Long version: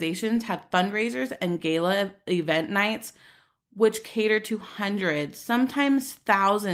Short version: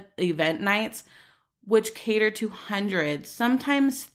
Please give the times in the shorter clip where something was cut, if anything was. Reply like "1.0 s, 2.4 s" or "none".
none